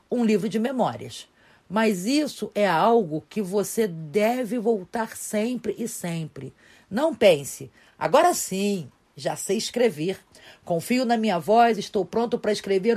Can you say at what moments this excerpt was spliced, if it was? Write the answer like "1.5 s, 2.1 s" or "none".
none